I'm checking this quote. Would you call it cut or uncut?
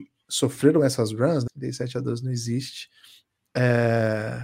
cut